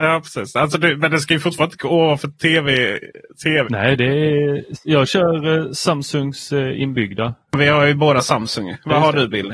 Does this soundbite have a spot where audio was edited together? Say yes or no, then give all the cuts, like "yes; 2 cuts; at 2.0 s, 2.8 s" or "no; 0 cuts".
yes; 1 cut; at 3.6 s